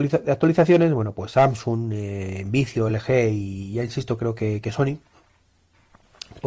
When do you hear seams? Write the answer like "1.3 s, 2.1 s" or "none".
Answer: none